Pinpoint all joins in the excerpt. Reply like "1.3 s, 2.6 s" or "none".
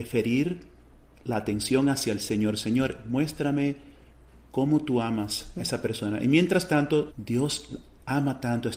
7.1 s